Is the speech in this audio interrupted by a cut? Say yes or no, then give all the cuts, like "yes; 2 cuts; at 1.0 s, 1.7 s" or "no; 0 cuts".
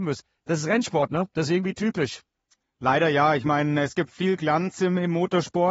no; 0 cuts